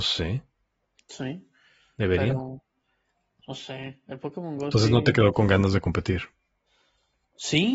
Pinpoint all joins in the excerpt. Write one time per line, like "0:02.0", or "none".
none